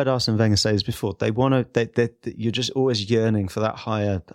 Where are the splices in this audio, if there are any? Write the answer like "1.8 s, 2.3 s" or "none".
none